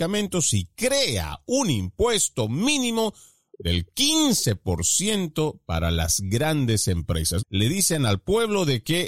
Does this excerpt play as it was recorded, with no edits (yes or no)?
no